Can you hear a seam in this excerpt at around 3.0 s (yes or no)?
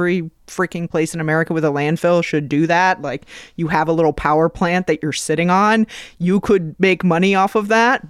no